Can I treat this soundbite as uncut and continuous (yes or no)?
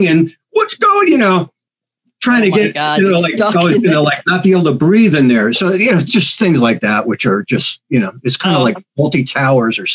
yes